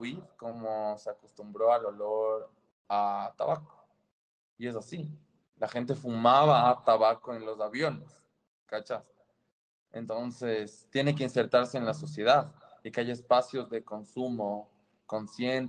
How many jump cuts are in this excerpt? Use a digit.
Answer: 0